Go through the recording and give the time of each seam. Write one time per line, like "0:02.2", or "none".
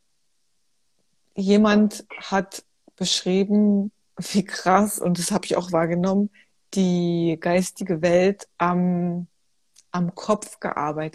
none